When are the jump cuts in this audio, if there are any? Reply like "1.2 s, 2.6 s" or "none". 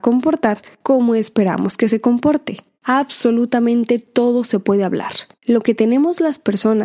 2.7 s, 5.3 s